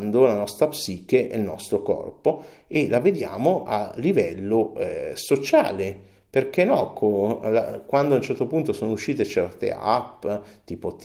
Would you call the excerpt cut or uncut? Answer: uncut